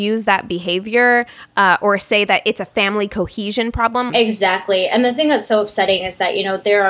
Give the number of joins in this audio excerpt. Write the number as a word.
one